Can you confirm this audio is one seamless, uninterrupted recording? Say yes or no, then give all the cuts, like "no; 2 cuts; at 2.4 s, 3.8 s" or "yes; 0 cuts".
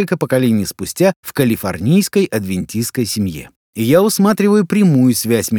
no; 1 cut; at 3.6 s